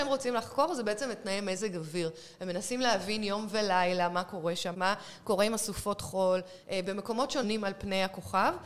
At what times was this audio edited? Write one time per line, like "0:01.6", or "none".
0:04.7